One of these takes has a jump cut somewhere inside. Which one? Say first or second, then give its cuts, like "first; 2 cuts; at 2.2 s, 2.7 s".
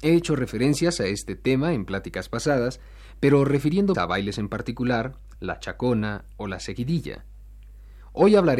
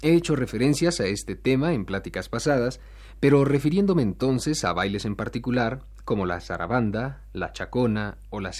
first; 2 cuts; at 3.9 s, 5.4 s